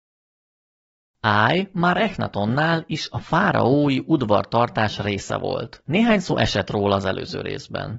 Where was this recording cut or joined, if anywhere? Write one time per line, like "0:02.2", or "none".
none